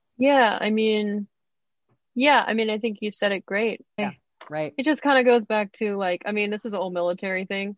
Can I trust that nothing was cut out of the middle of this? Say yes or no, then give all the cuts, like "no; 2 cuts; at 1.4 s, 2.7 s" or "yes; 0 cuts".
no; 1 cut; at 4.0 s